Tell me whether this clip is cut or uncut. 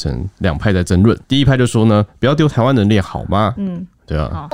cut